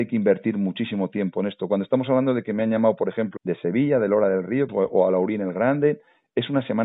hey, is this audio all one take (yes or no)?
no